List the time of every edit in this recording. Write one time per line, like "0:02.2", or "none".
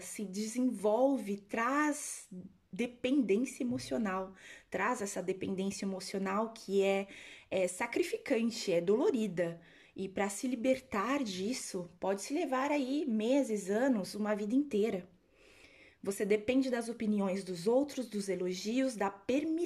none